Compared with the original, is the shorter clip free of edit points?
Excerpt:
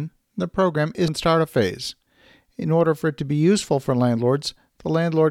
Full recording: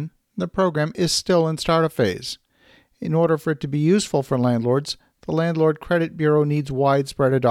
no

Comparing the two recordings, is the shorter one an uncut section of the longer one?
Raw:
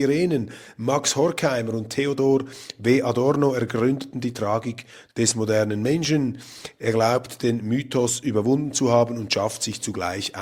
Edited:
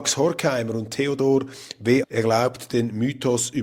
no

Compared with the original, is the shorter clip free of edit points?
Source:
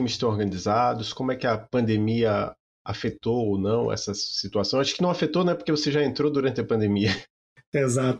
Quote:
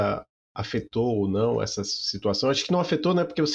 yes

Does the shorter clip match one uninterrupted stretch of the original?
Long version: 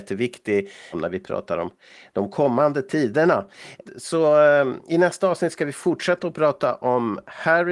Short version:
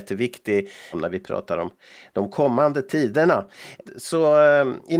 yes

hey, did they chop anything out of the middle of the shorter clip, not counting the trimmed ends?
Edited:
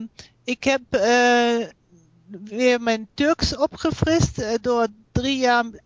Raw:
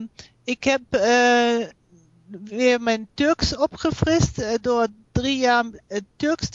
no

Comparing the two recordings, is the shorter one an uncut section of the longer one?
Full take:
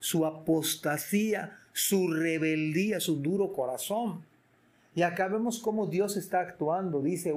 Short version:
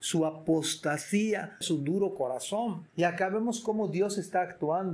no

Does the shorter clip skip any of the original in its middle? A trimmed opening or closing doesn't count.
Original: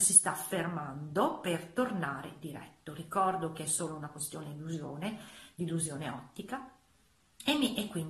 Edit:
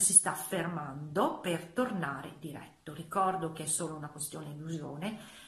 no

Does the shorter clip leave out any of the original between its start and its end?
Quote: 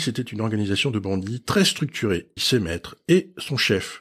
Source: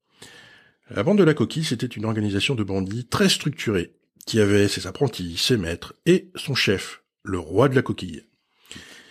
yes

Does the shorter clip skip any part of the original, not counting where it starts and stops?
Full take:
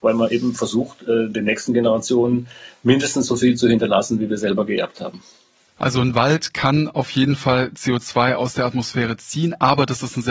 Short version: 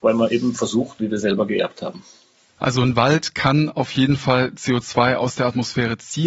yes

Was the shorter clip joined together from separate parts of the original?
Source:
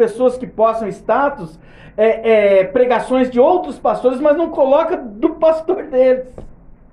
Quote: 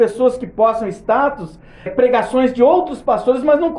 yes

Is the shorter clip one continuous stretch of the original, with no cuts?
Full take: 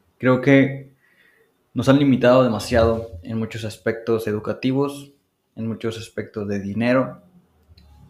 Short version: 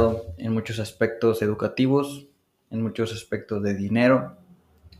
yes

